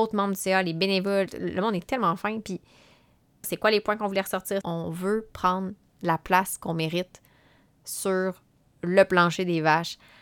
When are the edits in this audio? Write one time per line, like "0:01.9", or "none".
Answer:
0:03.4
0:04.6